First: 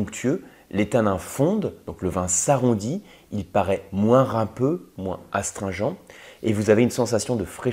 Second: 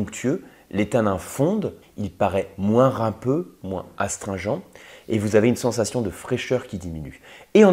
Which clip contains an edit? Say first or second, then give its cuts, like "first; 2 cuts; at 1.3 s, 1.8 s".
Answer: second; 1 cut; at 1.8 s